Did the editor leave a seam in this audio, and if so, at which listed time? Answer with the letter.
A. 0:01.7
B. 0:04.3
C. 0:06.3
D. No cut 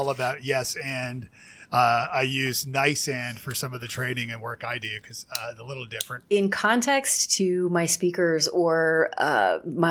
C